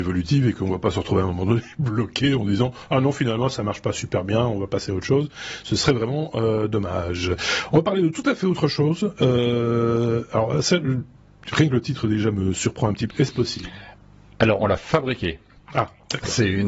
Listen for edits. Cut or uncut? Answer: cut